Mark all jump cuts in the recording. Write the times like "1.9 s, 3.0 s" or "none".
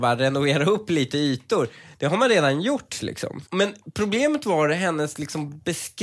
3.5 s